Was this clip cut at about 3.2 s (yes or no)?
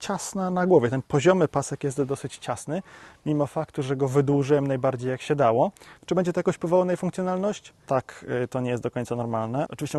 no